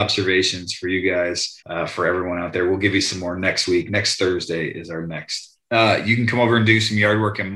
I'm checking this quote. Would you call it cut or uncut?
cut